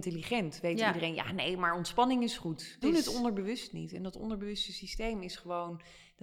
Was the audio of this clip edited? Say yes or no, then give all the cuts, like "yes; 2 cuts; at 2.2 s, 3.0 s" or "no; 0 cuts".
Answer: yes; 1 cut; at 2.8 s